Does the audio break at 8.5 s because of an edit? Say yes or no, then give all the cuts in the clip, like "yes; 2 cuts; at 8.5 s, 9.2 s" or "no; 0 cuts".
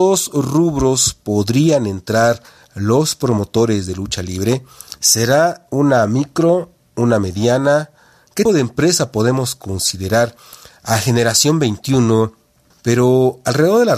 yes; 2 cuts; at 8.5 s, 12.7 s